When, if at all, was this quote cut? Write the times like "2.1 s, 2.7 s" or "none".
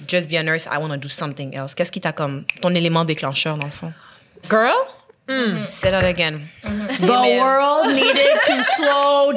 4.4 s